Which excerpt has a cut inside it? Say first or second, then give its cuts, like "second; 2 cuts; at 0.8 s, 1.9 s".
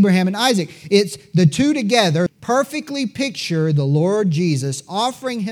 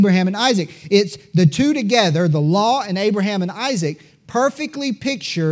first; 1 cut; at 2.3 s